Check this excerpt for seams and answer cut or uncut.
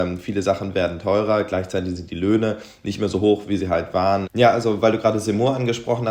cut